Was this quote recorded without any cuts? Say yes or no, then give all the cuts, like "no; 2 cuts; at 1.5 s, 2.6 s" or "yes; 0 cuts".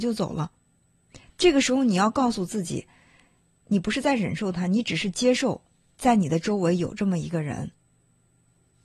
yes; 0 cuts